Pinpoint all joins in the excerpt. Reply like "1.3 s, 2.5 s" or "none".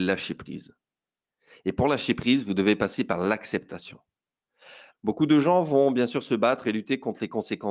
4.9 s